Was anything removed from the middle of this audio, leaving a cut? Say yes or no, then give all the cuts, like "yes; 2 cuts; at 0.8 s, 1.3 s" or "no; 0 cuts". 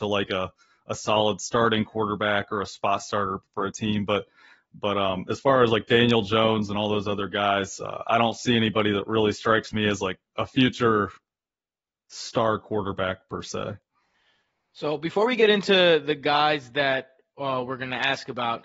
no; 0 cuts